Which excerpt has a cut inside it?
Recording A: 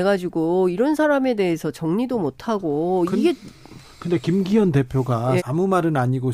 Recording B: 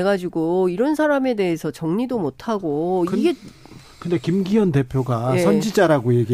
A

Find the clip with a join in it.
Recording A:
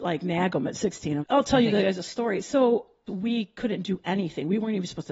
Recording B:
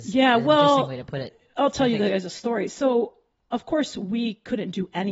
A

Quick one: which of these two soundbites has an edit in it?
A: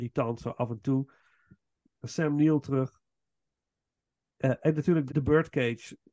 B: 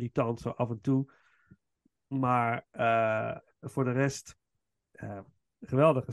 A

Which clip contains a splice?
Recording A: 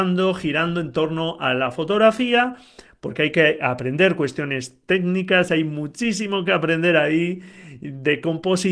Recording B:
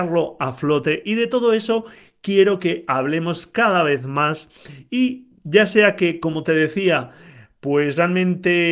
A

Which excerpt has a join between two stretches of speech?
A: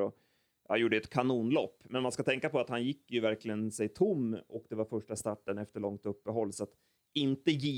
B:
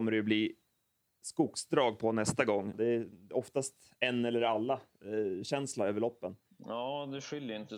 B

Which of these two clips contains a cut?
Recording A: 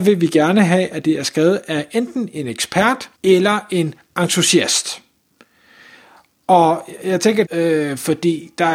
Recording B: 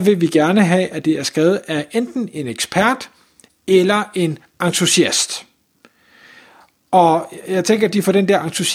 A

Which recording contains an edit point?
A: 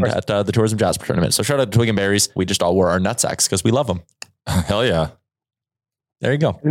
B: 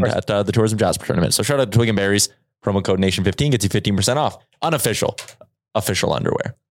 A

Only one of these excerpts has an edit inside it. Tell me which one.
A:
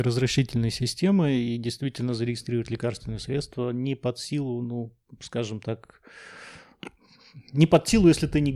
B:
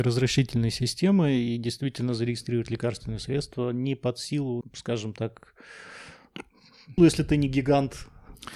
B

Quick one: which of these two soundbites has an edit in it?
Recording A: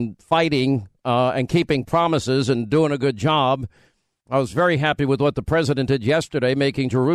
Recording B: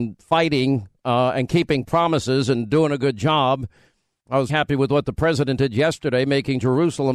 B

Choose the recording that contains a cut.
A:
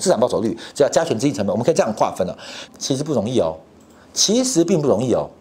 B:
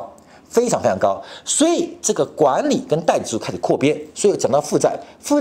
A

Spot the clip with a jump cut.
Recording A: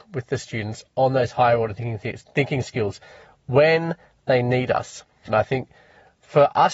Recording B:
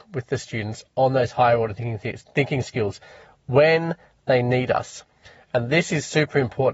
A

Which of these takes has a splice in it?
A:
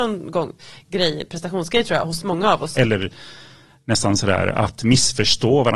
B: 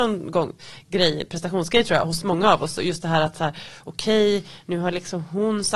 A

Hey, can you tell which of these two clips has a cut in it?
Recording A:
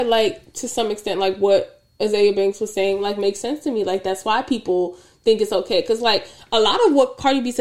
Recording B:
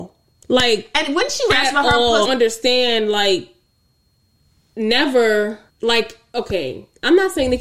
B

